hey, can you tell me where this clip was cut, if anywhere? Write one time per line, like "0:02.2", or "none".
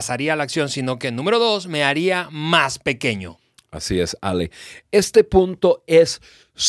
none